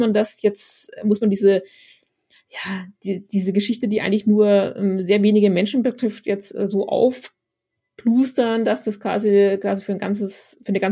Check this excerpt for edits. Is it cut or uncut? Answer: uncut